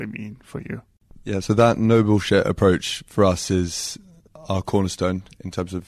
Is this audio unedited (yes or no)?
yes